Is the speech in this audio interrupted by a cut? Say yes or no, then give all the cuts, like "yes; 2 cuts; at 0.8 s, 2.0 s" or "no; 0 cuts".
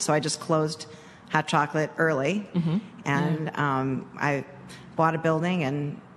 yes; 1 cut; at 3.0 s